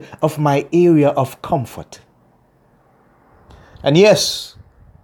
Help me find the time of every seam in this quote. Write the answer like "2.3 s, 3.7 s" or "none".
3.7 s

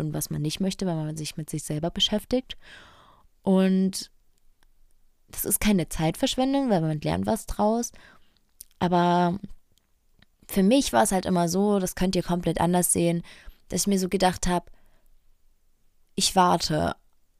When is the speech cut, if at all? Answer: none

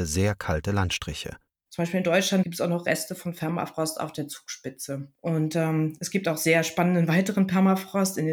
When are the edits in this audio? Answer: 1.5 s, 5.1 s

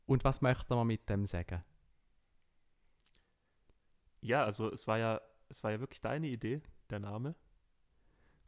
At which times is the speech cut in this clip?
none

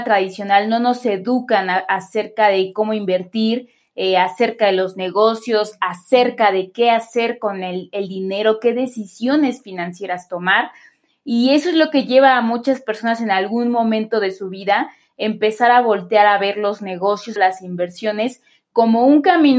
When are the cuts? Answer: 17.4 s

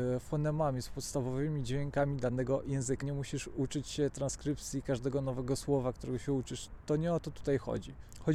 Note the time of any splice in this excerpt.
3.0 s

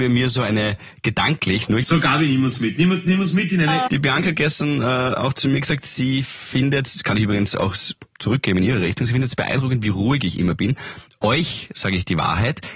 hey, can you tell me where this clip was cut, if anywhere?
1.8 s, 3.9 s

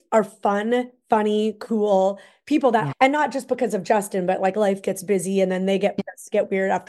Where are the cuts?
2.9 s, 6.0 s

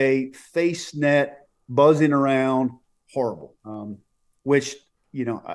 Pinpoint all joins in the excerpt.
3.6 s

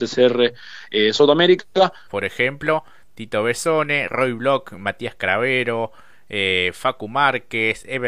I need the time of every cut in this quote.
2.0 s

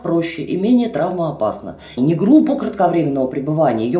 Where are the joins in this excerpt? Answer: 2.0 s

